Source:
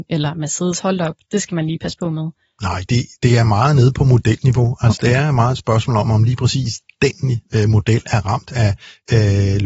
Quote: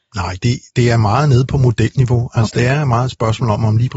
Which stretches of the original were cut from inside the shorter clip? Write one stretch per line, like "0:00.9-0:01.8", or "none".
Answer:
none